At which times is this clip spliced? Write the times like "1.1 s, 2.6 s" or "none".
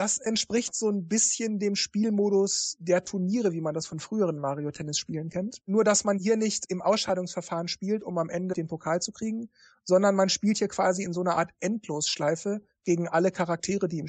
none